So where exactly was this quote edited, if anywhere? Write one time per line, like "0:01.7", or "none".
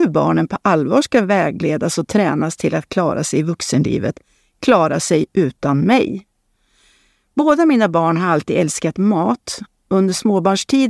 none